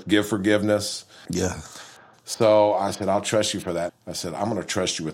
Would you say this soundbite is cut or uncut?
cut